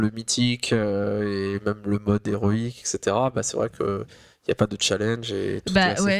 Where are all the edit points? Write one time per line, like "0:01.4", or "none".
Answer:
none